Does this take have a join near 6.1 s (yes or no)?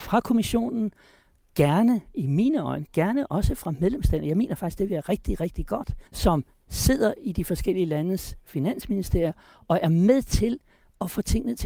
yes